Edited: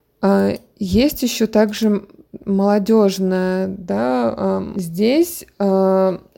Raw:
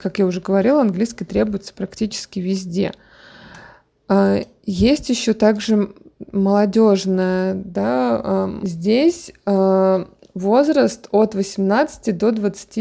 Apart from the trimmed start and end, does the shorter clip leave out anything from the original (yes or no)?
no